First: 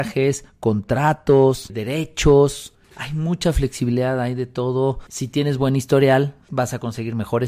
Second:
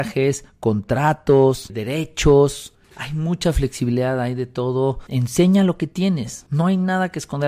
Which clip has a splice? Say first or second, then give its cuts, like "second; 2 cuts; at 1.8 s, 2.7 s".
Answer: first; 2 cuts; at 5.1 s, 6.4 s